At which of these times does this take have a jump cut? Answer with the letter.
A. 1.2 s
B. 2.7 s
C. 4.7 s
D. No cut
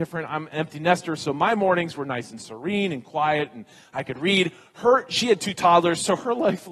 D